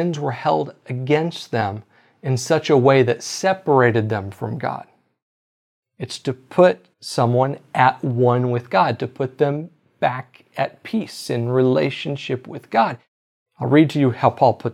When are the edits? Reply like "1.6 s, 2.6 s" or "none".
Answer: 5.8 s, 6.9 s, 13.5 s